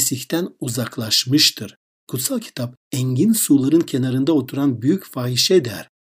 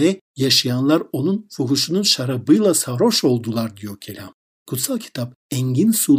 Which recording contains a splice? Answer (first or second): second